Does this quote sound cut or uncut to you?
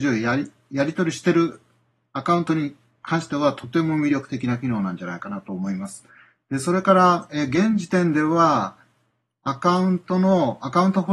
uncut